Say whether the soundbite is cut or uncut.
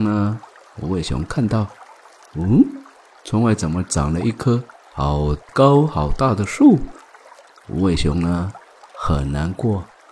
cut